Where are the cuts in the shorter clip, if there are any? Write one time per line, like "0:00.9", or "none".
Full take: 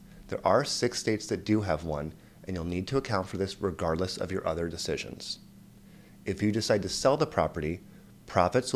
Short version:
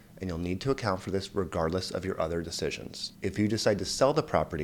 0:03.1